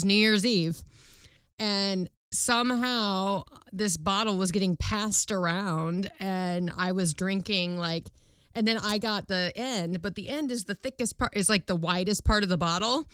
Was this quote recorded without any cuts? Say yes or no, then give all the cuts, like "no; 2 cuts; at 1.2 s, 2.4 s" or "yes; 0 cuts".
yes; 0 cuts